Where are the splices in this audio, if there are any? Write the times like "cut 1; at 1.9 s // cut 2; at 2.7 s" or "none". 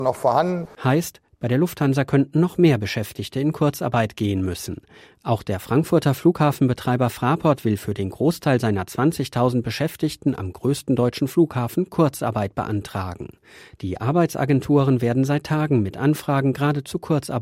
none